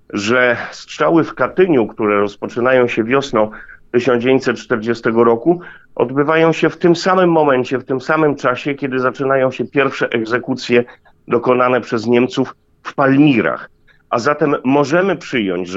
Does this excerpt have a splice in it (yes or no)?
no